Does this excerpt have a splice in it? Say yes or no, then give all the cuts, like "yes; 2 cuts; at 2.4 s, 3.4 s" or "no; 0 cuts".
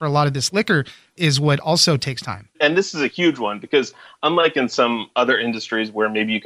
yes; 1 cut; at 2.5 s